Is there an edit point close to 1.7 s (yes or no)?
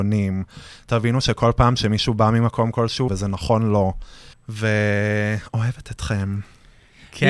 no